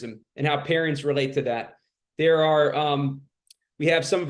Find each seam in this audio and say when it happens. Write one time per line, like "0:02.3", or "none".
none